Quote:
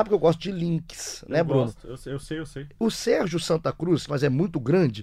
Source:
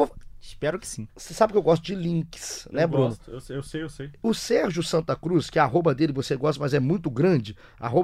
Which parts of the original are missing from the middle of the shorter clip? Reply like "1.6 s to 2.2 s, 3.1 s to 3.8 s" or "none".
5.5 s to 6.6 s